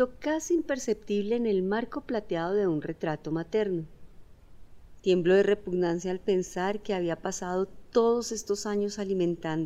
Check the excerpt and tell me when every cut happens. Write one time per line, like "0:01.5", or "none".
0:05.0